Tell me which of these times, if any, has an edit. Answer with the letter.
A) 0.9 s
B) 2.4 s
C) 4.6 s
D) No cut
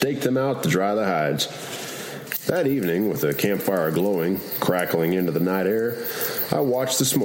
D